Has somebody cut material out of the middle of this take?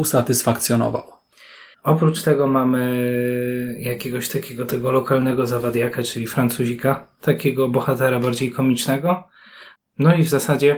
yes; 1 cut; at 1.7 s

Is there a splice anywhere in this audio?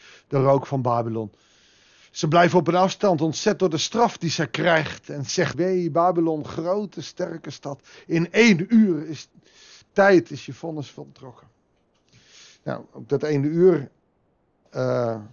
yes; 1 cut; at 5.5 s

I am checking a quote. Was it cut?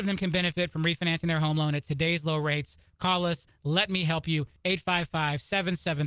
no; 0 cuts

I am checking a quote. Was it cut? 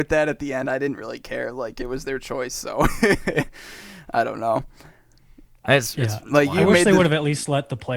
no; 0 cuts

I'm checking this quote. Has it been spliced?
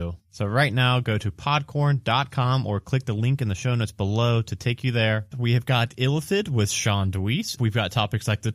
yes; 2 cuts; at 5.3 s, 7.6 s

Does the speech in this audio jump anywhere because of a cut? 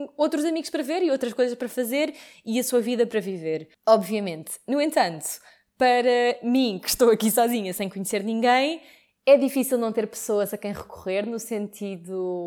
no; 0 cuts

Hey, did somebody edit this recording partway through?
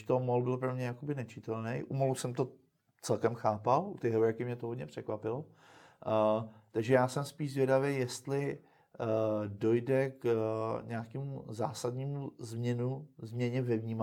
no; 0 cuts

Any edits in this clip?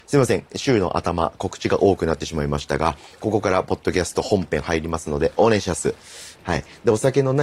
yes; 1 cut; at 6.3 s

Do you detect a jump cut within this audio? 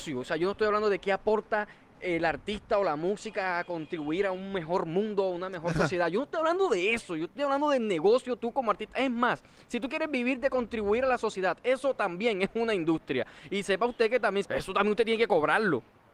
yes; 1 cut; at 14.4 s

